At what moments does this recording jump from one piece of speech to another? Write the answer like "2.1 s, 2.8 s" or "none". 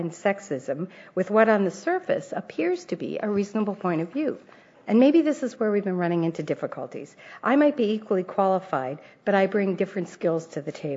4.7 s